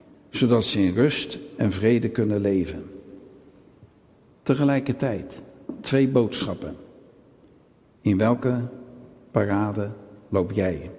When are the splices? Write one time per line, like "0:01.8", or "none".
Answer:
none